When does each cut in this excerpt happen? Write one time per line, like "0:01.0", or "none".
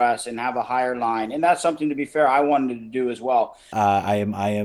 0:03.7